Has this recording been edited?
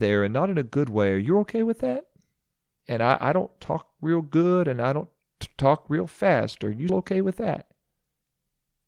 yes; 1 cut; at 6.9 s

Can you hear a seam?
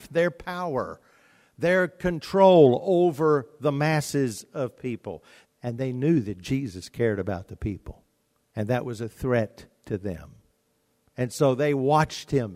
yes; 1 cut; at 5.4 s

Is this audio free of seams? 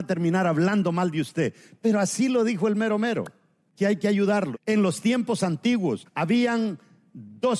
no; 2 cuts; at 4.5 s, 6.1 s

